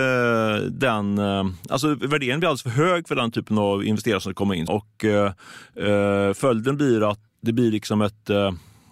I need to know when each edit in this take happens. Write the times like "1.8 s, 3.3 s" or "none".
4.7 s, 7.3 s